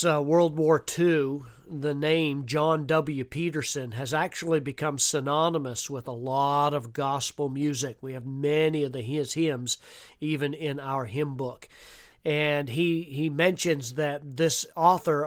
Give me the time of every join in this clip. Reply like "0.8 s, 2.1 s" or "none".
12.1 s

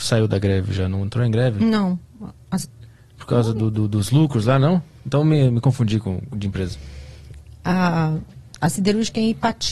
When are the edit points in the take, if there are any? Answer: none

